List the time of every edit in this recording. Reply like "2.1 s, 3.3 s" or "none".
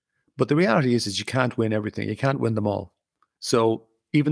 3.4 s